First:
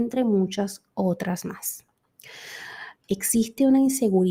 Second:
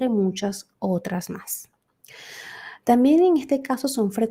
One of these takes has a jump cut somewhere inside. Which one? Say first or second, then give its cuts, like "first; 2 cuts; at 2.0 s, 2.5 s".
first; 1 cut; at 3.0 s